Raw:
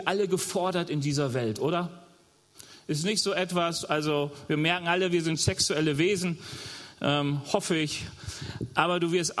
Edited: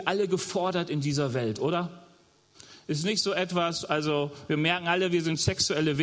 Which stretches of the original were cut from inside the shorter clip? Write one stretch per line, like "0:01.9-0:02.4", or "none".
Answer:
none